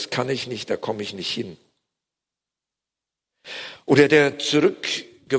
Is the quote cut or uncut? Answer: uncut